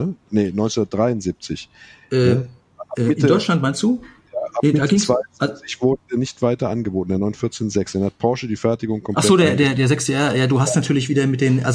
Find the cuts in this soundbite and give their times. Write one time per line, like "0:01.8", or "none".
none